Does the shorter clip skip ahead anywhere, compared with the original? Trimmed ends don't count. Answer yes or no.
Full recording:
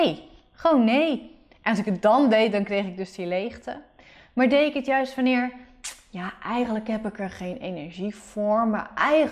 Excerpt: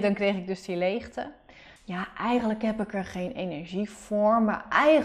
yes